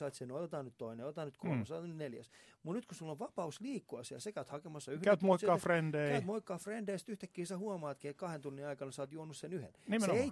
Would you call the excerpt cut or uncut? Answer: uncut